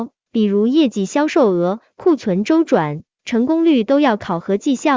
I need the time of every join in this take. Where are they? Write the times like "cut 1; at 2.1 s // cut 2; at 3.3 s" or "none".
none

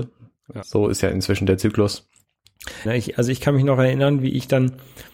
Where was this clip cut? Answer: cut 1; at 2.9 s

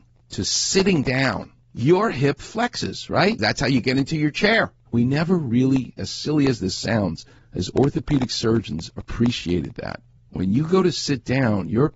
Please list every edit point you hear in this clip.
cut 1; at 3.4 s // cut 2; at 4.9 s

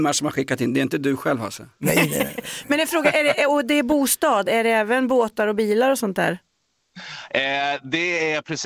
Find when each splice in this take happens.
none

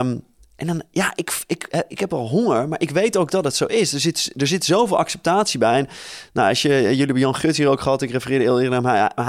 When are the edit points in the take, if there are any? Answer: none

